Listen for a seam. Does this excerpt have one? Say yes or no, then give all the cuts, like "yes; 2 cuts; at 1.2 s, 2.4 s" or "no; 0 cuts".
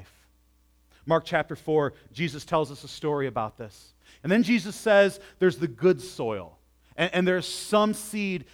yes; 1 cut; at 4.2 s